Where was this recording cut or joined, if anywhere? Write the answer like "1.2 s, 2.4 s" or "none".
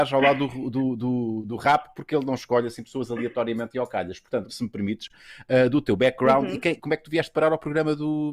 4.5 s, 6.8 s